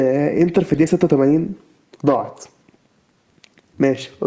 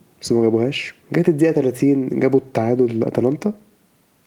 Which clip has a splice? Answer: second; 1 cut; at 1.0 s

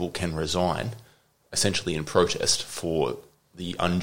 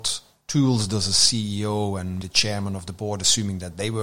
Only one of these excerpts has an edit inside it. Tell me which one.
second; 1 cut; at 2.2 s

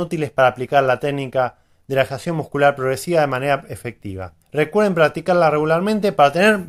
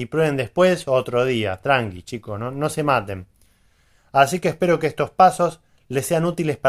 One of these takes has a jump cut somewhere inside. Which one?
first; 1 cut; at 4.4 s

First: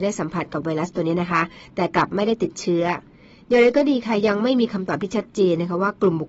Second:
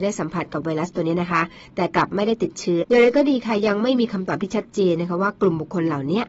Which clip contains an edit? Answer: second; 1 cut; at 2.8 s

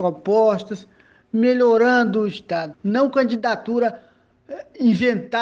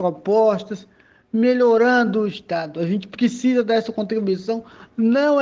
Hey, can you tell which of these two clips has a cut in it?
first; 1 cut; at 2.7 s

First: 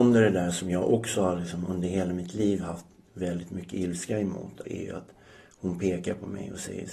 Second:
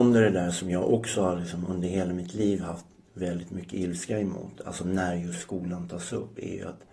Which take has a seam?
first; 1 cut; at 4.6 s

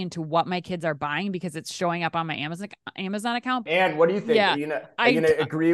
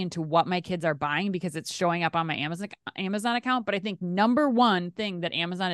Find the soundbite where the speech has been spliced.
first; 1 cut; at 3.7 s

